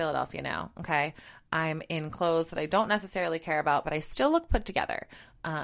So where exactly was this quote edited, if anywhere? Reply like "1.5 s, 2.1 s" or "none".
none